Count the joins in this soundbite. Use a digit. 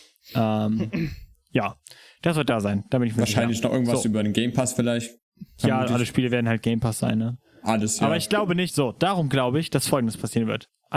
1